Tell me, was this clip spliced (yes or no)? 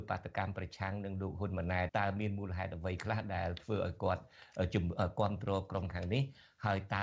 yes